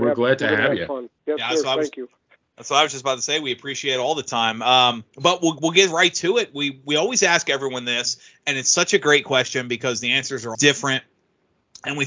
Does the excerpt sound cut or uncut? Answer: cut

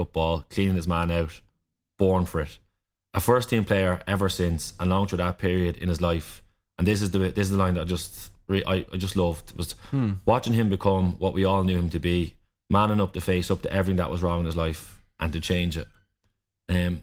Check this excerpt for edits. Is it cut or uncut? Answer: uncut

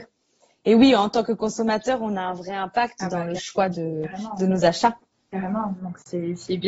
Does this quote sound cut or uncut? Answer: uncut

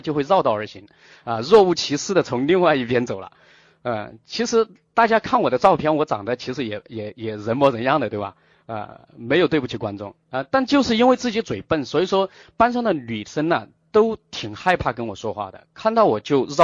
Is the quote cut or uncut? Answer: uncut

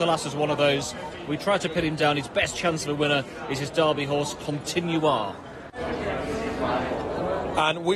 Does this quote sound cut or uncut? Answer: uncut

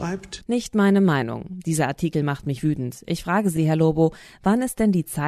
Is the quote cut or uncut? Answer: uncut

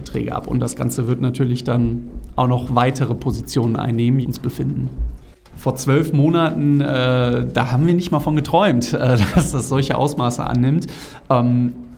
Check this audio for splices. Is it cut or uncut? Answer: cut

